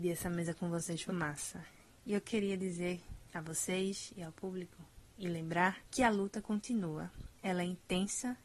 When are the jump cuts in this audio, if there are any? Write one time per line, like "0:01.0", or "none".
0:01.1
0:05.8